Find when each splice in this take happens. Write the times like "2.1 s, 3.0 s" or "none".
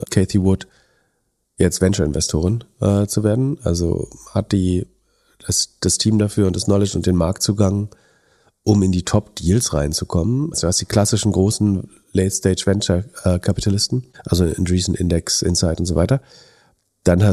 10.5 s